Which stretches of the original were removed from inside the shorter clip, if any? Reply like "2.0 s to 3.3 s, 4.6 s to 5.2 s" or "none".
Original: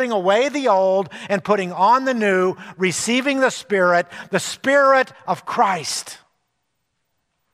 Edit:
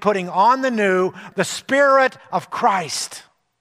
2.7 s to 4.3 s